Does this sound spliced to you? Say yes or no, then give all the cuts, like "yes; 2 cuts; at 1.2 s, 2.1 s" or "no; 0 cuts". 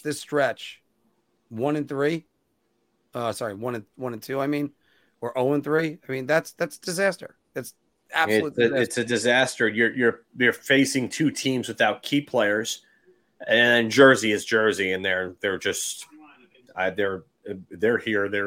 no; 0 cuts